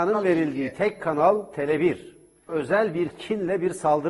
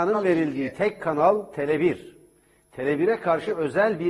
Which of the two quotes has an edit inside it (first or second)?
first